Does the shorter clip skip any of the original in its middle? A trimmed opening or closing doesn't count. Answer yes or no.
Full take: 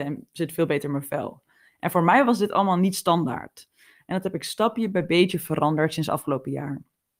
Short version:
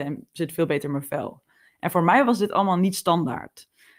no